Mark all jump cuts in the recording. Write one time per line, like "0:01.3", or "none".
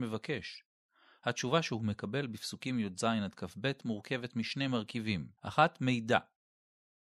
0:05.4